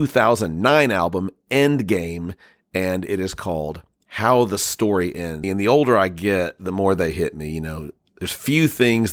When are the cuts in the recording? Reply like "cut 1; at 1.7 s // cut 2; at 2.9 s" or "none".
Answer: cut 1; at 5.4 s